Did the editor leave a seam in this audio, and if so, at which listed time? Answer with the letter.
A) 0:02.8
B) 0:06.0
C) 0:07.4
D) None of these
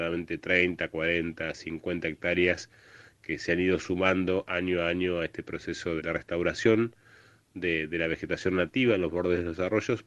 B